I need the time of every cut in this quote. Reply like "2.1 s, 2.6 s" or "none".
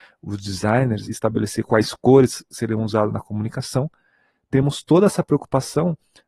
1.1 s